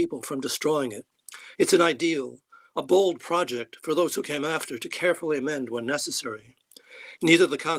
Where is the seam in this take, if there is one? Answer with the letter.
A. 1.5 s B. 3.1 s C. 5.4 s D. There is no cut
A